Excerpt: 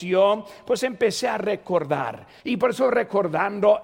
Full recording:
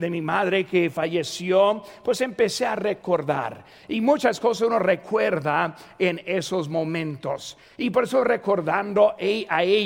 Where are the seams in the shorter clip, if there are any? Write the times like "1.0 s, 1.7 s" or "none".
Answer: 2.4 s